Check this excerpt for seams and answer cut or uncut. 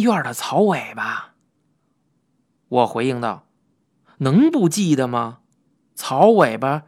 uncut